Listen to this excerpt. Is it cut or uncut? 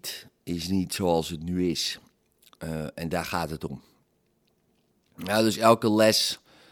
uncut